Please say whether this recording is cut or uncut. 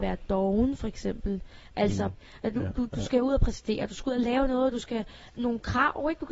cut